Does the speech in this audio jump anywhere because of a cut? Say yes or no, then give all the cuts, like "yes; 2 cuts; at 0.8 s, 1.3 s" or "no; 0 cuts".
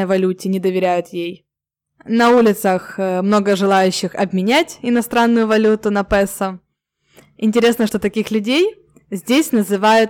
no; 0 cuts